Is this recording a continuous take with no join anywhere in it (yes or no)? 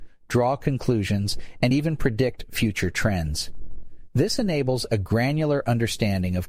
yes